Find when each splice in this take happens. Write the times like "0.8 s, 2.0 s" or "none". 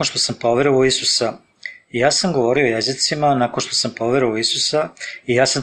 none